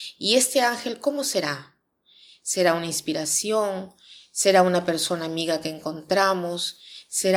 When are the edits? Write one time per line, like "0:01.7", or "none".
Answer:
none